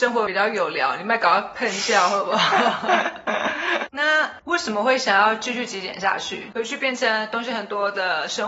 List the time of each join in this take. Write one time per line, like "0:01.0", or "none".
0:03.9
0:06.5

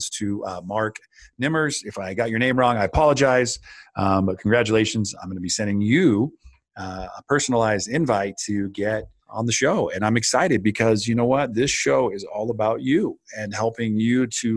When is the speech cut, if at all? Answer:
none

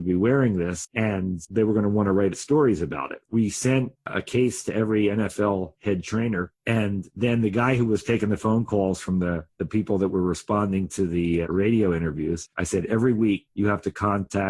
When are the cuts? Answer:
0:03.2
0:11.4

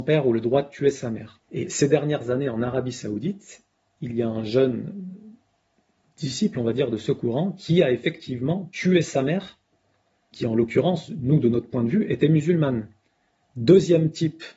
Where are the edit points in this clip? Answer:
0:01.4
0:10.3
0:13.4

